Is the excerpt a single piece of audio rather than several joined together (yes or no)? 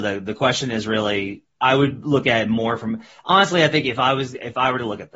no